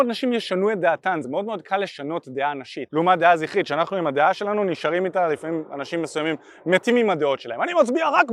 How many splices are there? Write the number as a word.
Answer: zero